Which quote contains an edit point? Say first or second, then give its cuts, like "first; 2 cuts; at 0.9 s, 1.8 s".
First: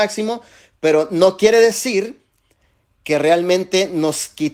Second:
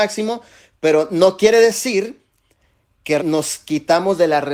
second; 1 cut; at 3.2 s